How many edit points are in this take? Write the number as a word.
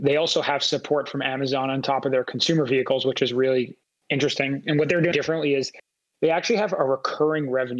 one